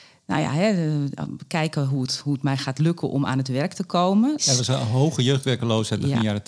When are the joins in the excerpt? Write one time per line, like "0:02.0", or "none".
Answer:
0:04.4